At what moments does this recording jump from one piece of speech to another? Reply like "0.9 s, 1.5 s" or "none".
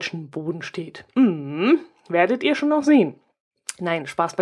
none